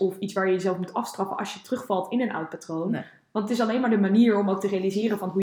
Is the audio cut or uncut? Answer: uncut